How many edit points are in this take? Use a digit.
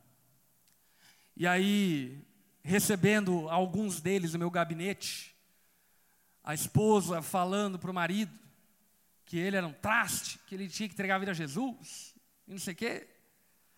0